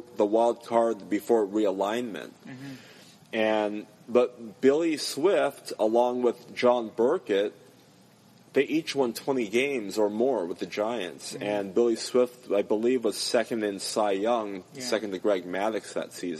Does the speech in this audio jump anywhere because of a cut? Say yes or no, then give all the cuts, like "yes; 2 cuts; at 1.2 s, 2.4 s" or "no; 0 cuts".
no; 0 cuts